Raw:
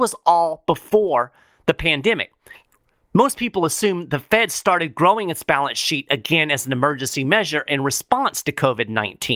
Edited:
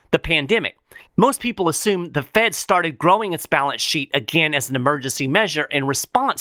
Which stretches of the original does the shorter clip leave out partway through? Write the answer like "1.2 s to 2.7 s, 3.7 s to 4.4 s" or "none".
2.6 s to 3.0 s